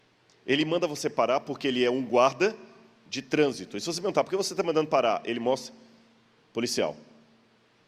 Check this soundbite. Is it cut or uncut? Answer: uncut